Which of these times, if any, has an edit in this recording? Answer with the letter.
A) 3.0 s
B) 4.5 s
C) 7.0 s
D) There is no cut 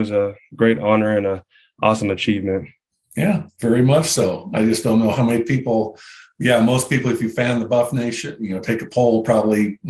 D